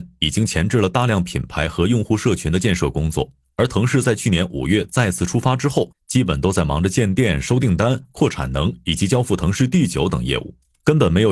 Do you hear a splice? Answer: no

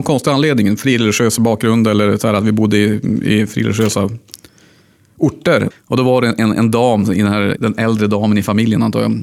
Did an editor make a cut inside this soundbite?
yes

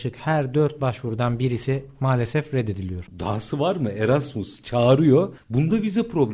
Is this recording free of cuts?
no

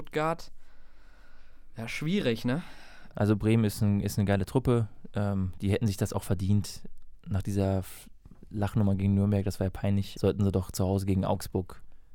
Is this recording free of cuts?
no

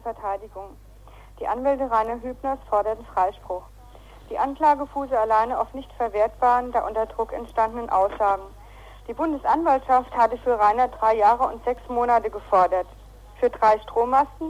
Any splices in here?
no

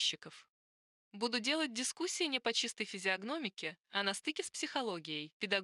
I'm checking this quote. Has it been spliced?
no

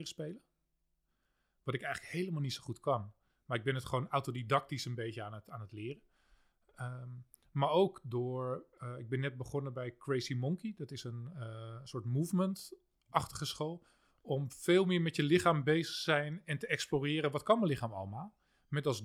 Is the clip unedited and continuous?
yes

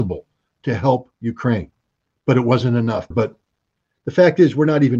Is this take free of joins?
no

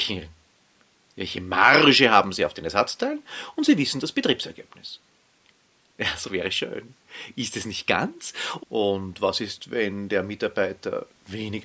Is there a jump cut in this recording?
yes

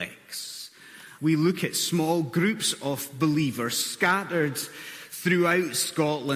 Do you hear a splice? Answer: yes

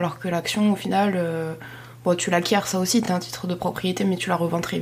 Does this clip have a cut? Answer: no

